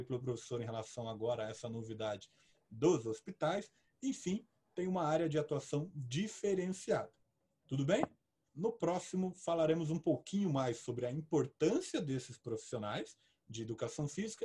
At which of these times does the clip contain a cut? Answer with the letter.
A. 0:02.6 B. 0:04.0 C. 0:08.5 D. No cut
C